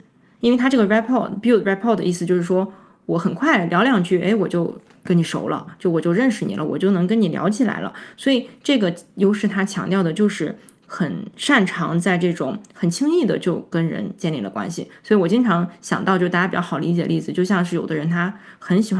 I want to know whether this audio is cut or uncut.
uncut